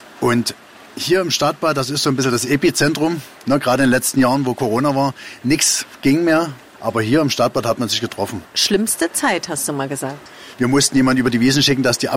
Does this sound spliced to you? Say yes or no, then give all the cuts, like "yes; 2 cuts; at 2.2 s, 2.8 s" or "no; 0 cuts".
yes; 2 cuts; at 8.5 s, 10.5 s